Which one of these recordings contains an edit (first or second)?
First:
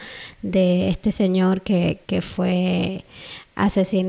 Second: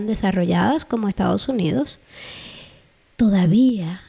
first